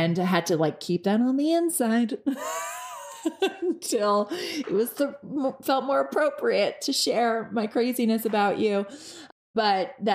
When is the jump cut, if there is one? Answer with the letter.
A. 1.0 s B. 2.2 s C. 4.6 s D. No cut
D